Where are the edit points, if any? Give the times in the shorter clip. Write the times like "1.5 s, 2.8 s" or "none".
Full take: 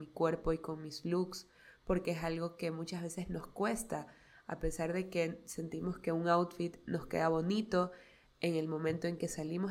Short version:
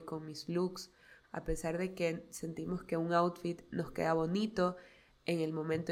1.2 s